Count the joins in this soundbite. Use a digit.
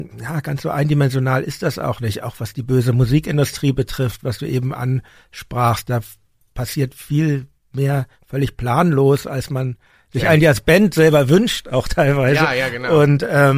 0